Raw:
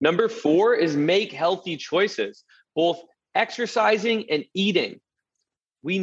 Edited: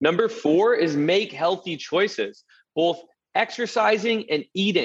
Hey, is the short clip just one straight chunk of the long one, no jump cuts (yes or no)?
yes